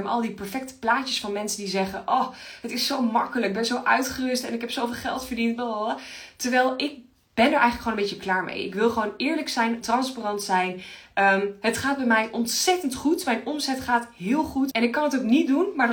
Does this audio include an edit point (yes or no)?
yes